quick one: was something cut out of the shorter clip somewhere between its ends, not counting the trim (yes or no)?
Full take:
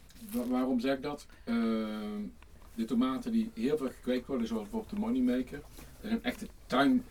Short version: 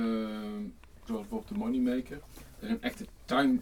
yes